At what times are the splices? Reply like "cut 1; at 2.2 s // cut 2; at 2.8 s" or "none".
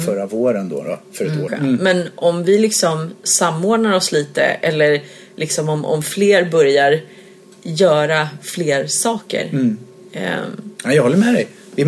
cut 1; at 1.5 s